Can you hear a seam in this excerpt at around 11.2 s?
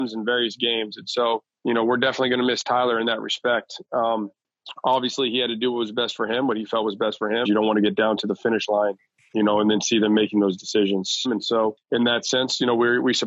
yes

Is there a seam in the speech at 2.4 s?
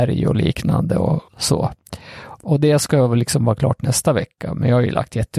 yes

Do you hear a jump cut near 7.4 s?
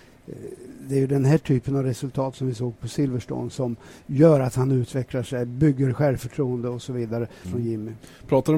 yes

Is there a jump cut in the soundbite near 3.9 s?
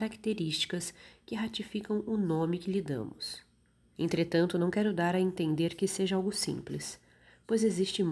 yes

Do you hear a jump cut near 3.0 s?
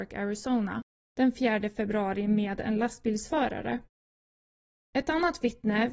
no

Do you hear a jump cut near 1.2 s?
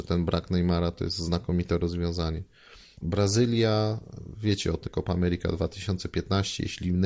no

